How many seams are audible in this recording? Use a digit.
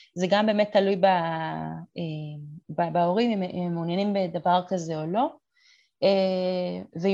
0